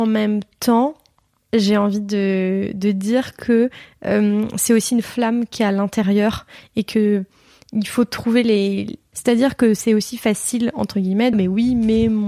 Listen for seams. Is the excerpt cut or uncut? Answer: cut